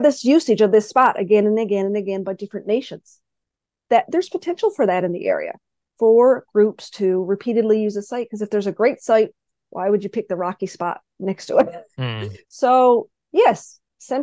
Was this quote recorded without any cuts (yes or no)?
no